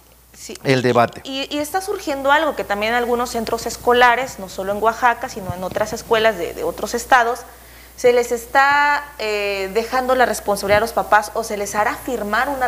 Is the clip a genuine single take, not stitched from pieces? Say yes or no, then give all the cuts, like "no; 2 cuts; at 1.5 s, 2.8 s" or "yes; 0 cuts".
yes; 0 cuts